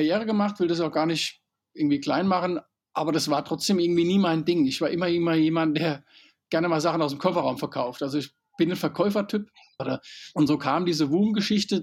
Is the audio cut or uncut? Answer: cut